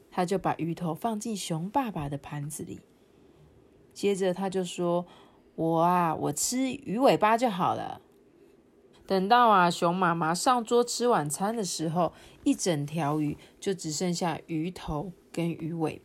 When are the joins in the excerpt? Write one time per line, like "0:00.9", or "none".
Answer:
0:08.9